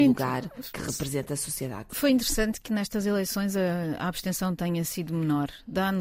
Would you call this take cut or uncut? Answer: uncut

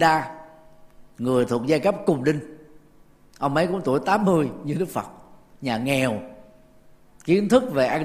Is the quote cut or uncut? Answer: uncut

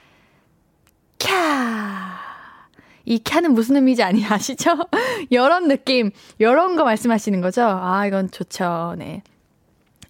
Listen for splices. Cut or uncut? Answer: uncut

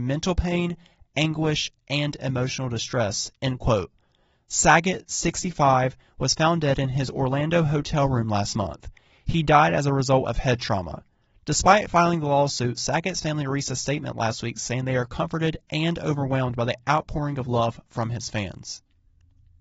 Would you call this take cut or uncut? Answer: uncut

